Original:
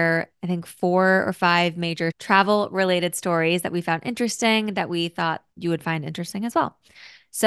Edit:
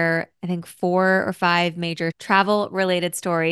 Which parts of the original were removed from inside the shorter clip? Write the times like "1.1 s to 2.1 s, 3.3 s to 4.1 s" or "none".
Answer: none